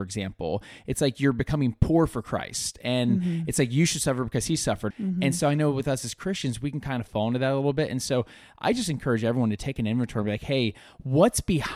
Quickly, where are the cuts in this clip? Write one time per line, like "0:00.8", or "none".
0:04.9